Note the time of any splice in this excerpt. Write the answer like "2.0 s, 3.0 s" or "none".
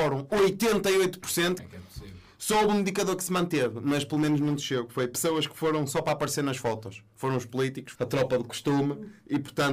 1.6 s, 7.9 s